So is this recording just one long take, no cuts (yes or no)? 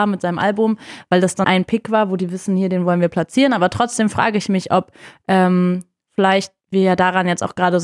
no